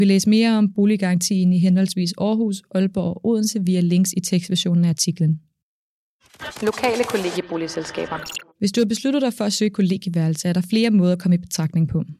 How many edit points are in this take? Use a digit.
1